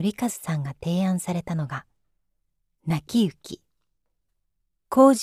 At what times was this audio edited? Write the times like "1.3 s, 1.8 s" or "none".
none